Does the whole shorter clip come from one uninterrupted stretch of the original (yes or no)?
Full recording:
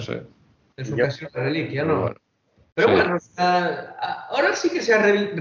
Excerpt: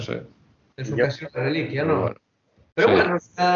yes